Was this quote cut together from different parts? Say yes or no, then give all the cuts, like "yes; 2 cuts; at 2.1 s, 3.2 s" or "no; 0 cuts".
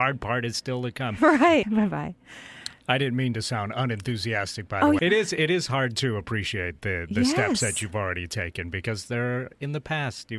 yes; 2 cuts; at 1.6 s, 5.0 s